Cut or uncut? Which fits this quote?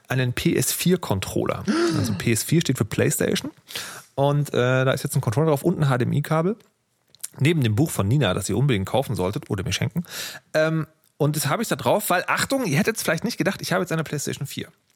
uncut